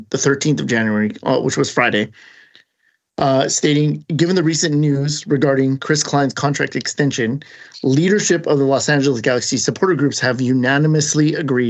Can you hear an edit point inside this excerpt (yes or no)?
no